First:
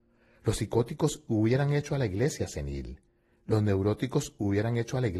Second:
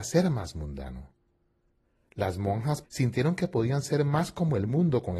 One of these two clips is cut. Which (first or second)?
second